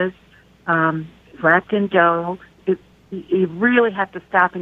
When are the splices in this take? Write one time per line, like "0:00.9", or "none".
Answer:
0:02.5